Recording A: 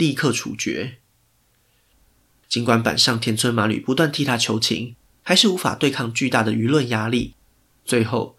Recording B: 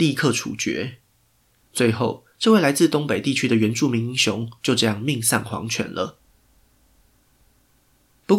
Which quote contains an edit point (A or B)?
B